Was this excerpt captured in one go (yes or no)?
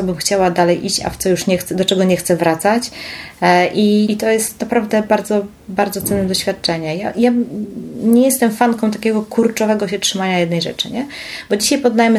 no